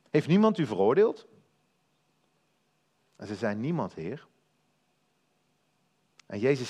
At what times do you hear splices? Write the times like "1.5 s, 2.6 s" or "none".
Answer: none